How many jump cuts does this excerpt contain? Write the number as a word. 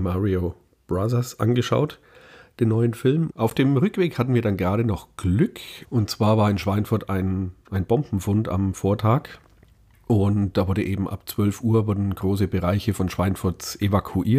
two